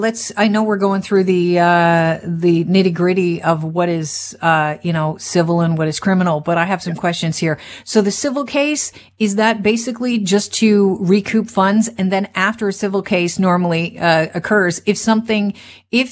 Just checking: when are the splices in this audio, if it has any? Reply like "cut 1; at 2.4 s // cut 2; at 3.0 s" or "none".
none